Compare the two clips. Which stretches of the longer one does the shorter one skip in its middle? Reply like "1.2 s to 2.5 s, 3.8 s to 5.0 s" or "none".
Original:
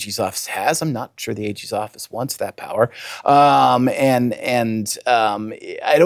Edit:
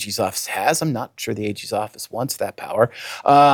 none